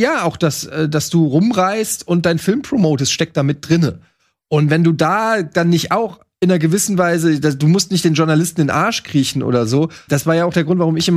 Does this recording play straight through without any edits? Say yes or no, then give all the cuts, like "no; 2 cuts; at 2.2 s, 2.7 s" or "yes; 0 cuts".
no; 1 cut; at 10.1 s